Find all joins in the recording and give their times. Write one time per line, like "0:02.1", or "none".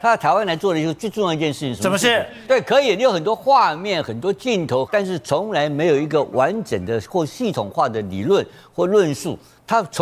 0:02.5
0:04.8